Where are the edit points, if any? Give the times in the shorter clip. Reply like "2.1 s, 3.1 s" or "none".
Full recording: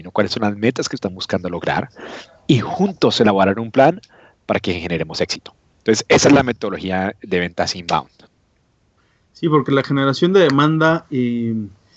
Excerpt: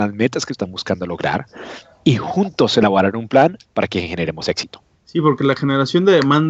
3.6 s, 4.9 s